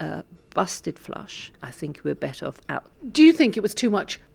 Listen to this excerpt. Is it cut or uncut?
cut